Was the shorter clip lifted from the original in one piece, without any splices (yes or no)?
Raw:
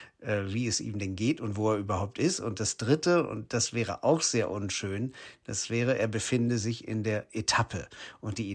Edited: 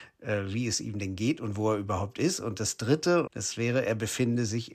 no